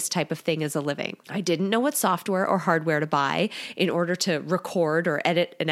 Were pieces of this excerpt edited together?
yes; 1 cut; at 1.2 s

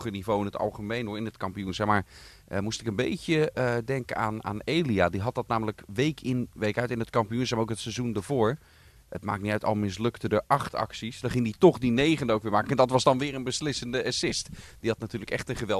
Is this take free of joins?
yes; 0 cuts

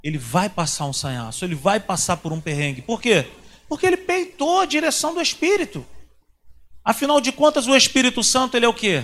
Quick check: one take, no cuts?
yes; 0 cuts

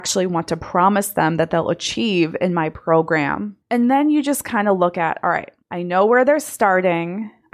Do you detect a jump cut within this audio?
yes; 2 cuts; at 3.6 s, 5.6 s

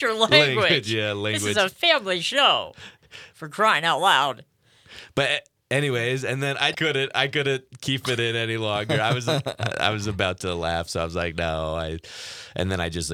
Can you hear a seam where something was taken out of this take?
yes; 1 cut; at 6.7 s

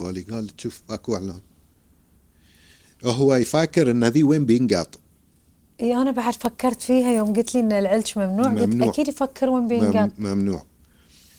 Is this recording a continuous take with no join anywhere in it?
yes; 0 cuts

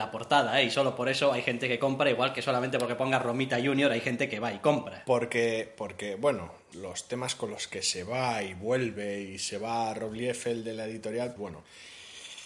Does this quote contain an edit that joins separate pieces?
yes; 2 cuts; at 6.7 s, 11.4 s

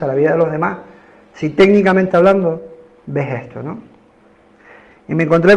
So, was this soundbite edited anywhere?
no; 0 cuts

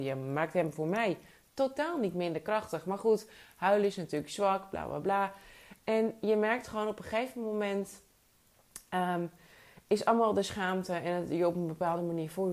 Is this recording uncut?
yes; 0 cuts

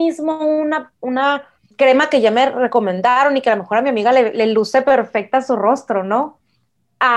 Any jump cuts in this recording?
no; 0 cuts

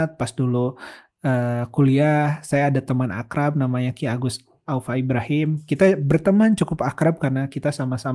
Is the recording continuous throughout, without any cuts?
yes; 0 cuts

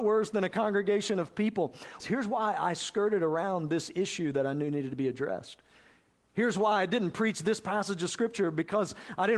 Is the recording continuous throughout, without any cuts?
no; 1 cut; at 2.0 s

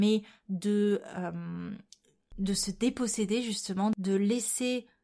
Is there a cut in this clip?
no; 0 cuts

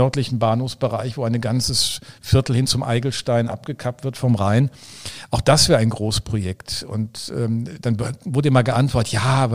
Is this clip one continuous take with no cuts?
yes; 0 cuts

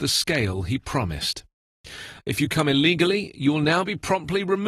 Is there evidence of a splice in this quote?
yes; 1 cut; at 2.2 s

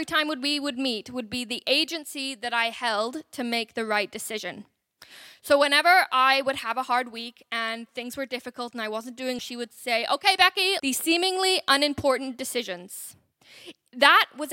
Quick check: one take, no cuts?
no; 2 cuts; at 9.4 s, 10.8 s

